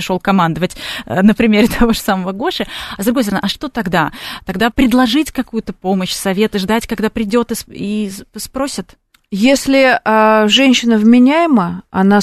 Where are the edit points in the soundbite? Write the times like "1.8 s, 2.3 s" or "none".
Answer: 4.7 s

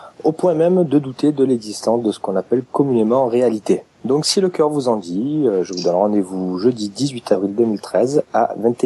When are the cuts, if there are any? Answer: 3.9 s

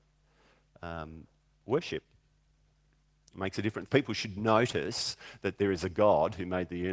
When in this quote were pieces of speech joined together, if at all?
3.9 s

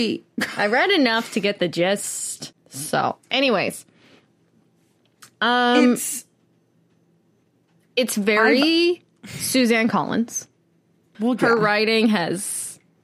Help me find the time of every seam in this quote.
11.1 s

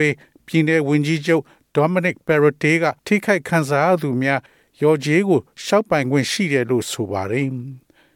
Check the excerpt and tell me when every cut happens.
3.0 s

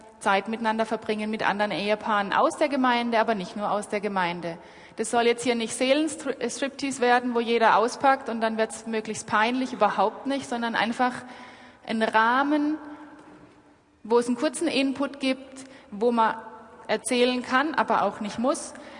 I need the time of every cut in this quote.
none

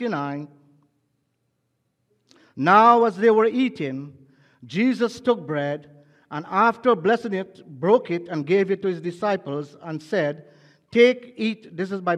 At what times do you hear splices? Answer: none

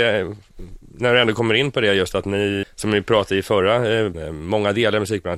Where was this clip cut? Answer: 2.6 s, 4.1 s

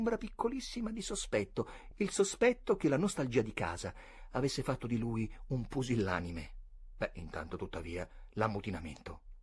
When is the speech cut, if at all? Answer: none

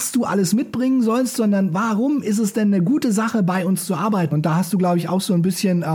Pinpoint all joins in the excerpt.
4.3 s

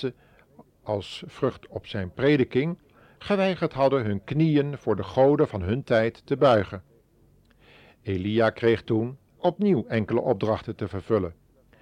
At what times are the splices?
9.3 s

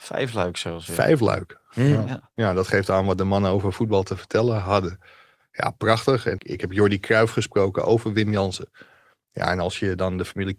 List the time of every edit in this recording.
6.4 s

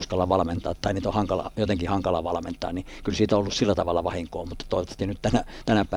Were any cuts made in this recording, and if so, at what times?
none

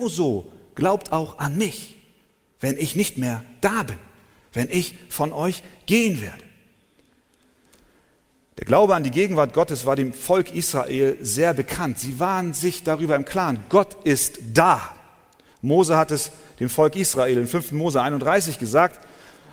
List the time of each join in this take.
none

